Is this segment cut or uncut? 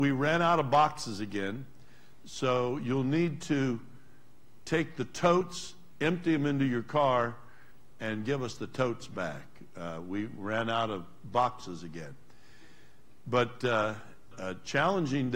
cut